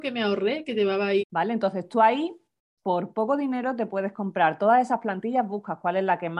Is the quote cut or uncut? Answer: cut